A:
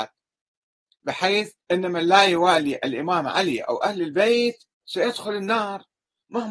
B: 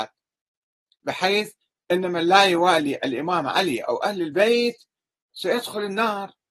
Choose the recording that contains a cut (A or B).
A